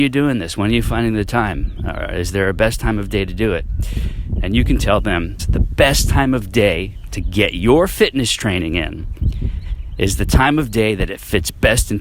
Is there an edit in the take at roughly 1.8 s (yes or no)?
no